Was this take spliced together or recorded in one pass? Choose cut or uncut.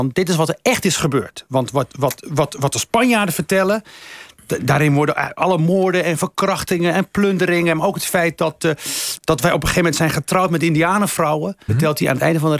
cut